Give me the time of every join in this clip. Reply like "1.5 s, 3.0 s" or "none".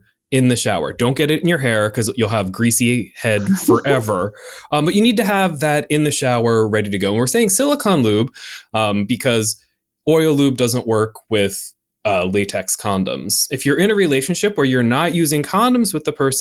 none